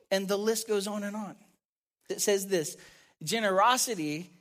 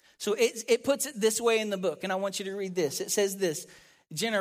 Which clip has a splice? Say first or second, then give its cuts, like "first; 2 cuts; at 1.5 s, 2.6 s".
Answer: first; 1 cut; at 2.1 s